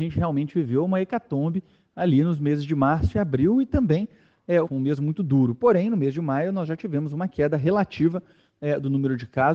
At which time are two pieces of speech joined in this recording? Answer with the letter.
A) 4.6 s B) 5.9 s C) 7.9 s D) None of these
A